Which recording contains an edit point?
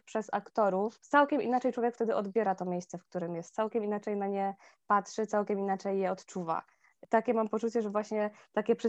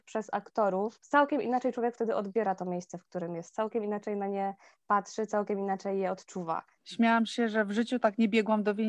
second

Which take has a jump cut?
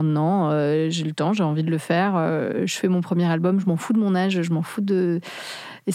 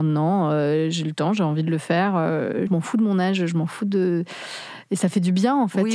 second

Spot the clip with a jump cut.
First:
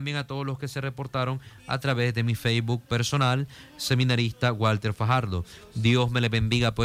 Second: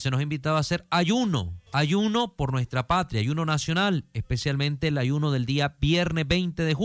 second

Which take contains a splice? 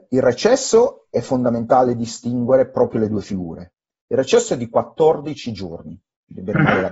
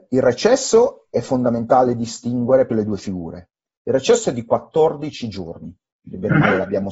second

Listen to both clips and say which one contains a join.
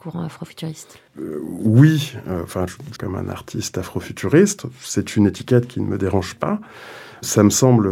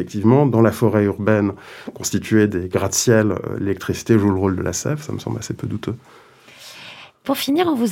first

